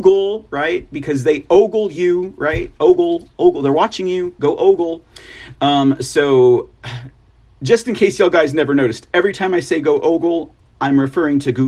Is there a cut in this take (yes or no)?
no